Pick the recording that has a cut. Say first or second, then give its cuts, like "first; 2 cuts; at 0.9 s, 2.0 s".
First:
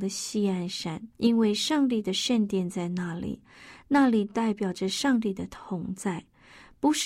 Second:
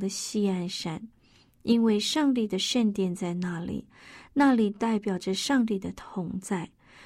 first; 1 cut; at 1.1 s